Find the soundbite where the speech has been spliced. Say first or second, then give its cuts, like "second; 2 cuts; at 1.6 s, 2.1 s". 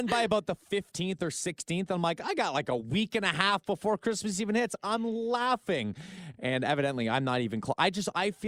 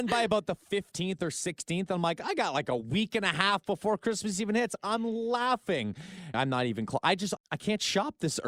second; 2 cuts; at 6.3 s, 7.4 s